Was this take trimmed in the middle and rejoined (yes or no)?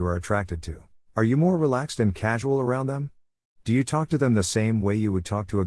yes